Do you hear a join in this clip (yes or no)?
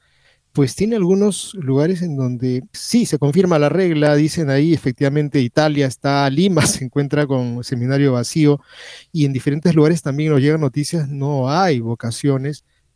yes